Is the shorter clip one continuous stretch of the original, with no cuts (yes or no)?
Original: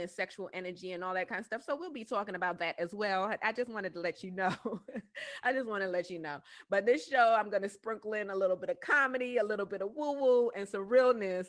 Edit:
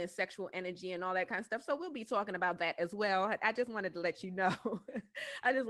yes